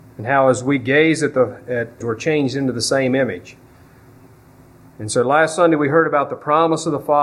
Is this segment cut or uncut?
cut